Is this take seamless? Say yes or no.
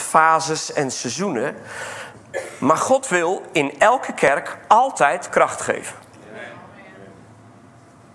yes